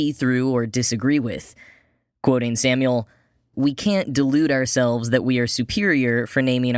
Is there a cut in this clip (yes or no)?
yes